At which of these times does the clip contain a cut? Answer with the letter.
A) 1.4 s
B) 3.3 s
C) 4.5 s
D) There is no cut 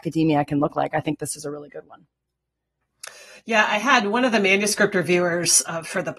D